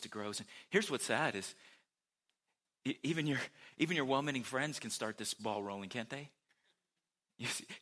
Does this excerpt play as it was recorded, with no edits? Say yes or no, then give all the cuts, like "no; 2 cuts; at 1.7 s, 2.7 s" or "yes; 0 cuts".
yes; 0 cuts